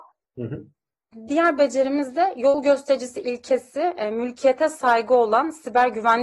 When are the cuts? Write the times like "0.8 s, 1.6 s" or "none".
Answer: none